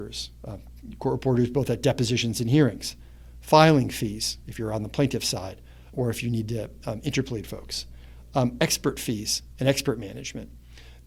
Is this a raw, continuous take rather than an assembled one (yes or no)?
no